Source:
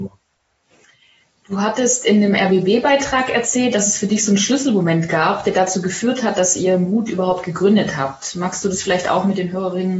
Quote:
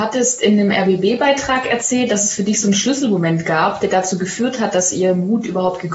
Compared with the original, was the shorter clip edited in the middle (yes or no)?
no